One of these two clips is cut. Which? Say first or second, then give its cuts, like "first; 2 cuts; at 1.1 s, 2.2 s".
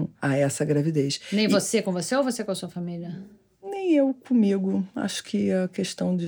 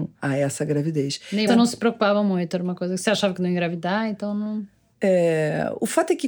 second; 1 cut; at 1.5 s